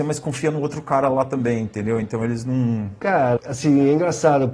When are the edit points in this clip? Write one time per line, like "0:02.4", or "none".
0:03.4